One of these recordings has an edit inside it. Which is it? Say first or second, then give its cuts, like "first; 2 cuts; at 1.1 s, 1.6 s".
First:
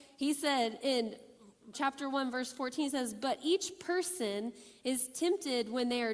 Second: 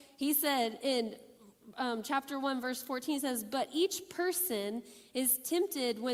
first; 1 cut; at 1.7 s